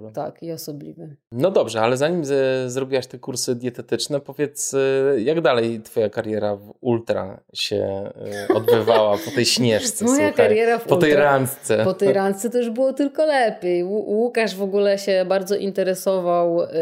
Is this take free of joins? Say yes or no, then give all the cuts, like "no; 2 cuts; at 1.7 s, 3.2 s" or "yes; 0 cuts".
yes; 0 cuts